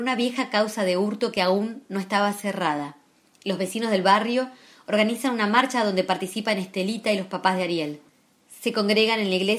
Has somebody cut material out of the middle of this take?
no; 0 cuts

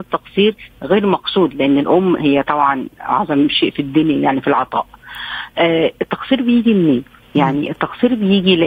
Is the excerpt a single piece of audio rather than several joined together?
yes; 0 cuts

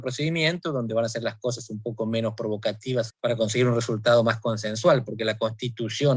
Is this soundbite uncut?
no; 1 cut; at 3.1 s

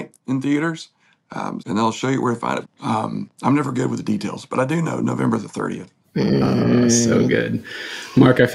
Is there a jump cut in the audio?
yes; 3 cuts; at 1.6 s, 2.6 s, 6.0 s

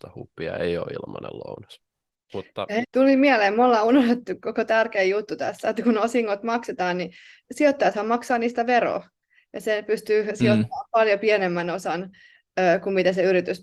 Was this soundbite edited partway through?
yes; 1 cut; at 2.8 s

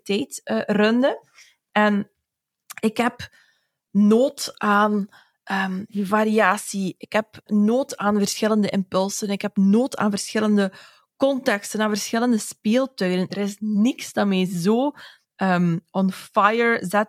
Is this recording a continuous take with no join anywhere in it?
no; 2 cuts; at 7.5 s, 13.3 s

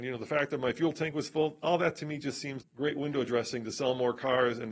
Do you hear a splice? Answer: yes; 1 cut; at 2.6 s

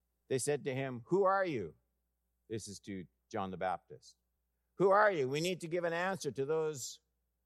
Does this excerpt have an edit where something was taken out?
no; 0 cuts

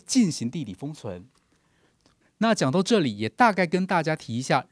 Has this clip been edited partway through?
yes; 1 cut; at 2.2 s

